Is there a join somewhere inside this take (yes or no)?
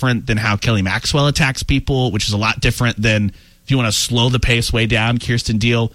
no